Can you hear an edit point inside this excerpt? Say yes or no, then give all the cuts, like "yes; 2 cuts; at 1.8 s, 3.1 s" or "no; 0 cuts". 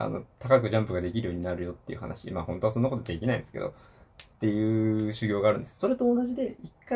no; 0 cuts